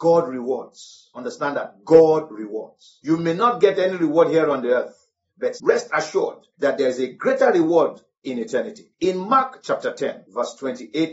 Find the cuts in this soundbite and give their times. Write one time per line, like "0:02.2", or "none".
none